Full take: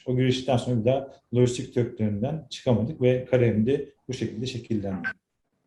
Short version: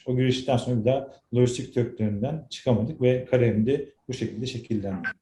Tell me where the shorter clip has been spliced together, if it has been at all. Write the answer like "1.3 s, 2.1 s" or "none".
none